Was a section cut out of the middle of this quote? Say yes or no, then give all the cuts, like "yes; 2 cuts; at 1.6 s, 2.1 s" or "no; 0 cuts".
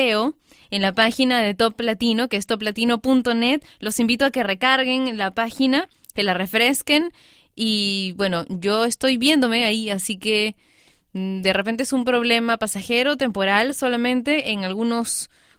no; 0 cuts